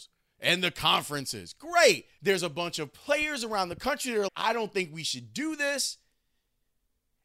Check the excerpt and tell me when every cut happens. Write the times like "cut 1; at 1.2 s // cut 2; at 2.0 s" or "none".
cut 1; at 2.2 s // cut 2; at 4.3 s